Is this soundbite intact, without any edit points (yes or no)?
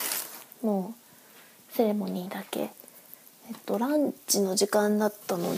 yes